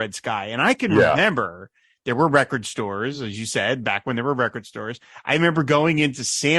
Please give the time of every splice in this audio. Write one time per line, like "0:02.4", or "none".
none